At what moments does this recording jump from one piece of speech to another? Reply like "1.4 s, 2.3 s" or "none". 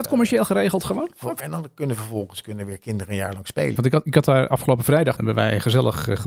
1.4 s, 3.8 s, 5.2 s